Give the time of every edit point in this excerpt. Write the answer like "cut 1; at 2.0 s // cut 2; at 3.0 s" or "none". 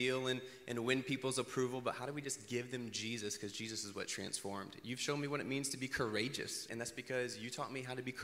cut 1; at 6.7 s